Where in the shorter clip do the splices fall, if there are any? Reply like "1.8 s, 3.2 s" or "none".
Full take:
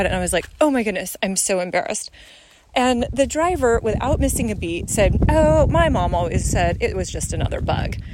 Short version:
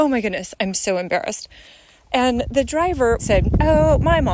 3.2 s